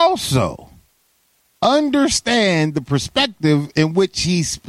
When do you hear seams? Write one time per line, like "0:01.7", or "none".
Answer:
none